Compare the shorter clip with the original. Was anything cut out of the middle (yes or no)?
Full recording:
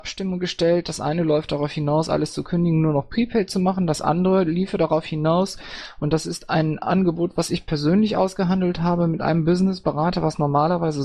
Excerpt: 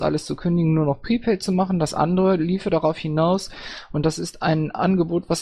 no